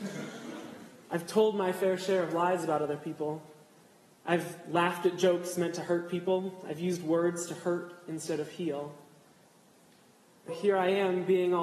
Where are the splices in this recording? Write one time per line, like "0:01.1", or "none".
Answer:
0:10.5